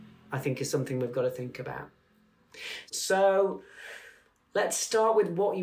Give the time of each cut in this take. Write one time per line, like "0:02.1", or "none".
0:02.9